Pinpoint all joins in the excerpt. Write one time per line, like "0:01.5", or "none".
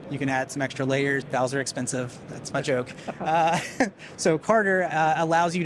0:01.2